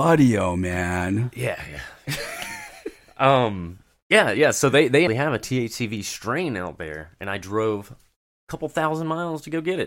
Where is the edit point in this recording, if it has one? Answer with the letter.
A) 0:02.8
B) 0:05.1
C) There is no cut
B